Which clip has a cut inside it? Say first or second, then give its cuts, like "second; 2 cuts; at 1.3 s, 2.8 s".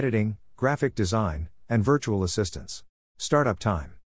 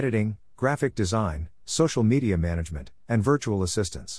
first; 2 cuts; at 1.6 s, 3.0 s